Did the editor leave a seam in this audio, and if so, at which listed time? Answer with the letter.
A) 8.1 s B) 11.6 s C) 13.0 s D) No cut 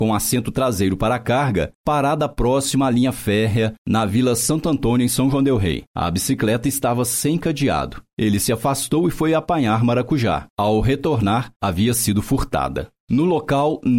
B